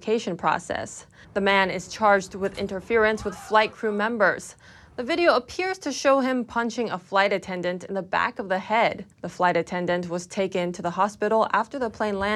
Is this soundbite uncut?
no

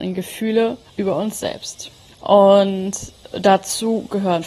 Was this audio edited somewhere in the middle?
yes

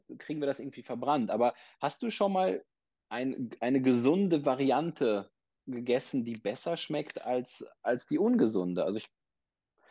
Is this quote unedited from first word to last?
yes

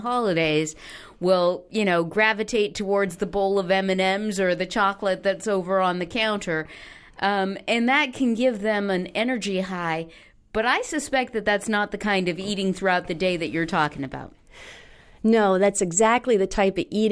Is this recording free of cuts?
yes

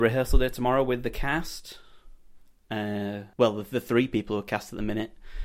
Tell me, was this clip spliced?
yes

